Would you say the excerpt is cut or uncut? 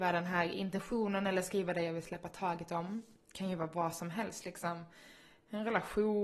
uncut